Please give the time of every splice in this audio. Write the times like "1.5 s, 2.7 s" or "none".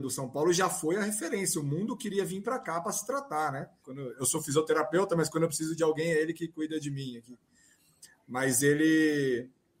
3.8 s